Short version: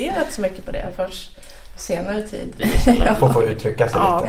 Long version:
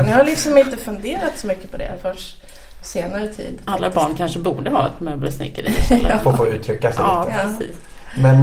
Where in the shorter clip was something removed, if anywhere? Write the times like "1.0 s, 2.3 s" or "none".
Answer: 2.6 s